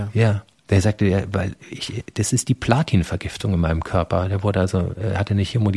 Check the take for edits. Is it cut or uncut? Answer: uncut